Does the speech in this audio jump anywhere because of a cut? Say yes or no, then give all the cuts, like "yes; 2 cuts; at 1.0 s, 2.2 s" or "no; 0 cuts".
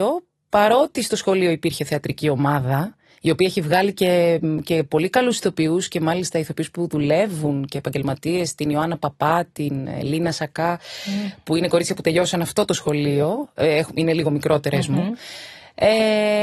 no; 0 cuts